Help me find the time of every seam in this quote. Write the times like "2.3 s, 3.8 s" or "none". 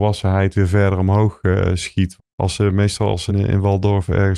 2.2 s, 3.3 s